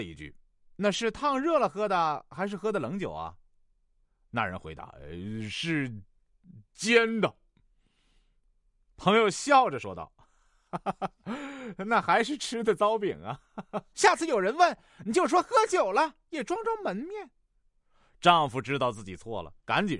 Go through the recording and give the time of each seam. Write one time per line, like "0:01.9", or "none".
0:13.9
0:17.6